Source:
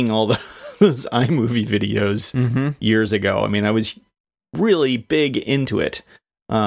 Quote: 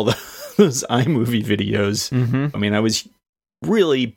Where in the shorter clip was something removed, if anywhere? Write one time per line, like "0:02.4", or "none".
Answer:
0:02.5